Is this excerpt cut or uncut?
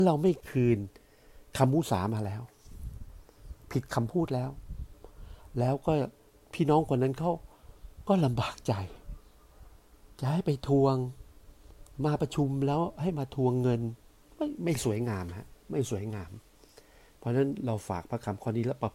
cut